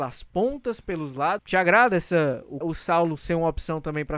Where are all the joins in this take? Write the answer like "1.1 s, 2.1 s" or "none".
1.4 s, 2.6 s